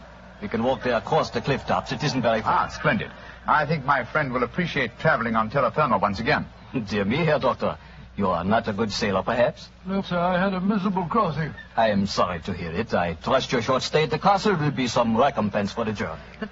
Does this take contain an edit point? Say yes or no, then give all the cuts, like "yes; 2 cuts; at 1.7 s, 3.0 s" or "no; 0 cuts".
yes; 1 cut; at 10.0 s